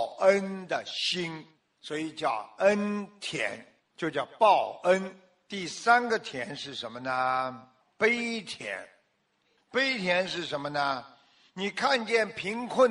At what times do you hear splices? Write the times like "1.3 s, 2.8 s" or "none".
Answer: none